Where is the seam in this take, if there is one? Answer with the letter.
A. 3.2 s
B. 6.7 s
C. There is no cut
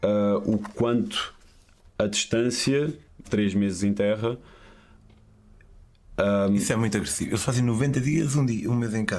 A